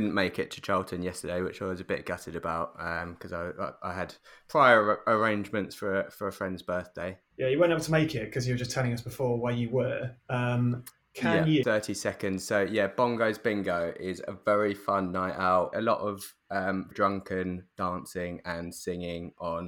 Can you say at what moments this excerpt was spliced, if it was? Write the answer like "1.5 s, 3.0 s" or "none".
11.6 s, 15.7 s, 16.9 s